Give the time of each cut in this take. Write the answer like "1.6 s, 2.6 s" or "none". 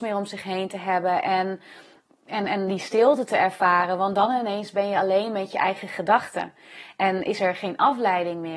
none